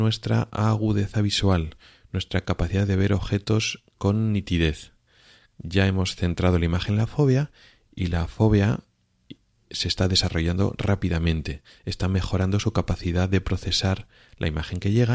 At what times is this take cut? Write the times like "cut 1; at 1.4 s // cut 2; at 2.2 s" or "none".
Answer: none